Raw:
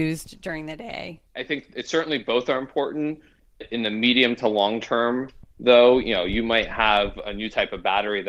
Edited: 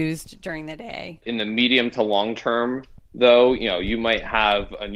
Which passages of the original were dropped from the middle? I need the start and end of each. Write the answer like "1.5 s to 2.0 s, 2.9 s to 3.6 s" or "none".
1.2 s to 3.7 s